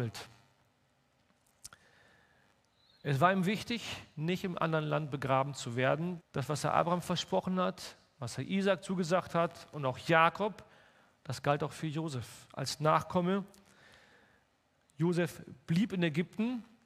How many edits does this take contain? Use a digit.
1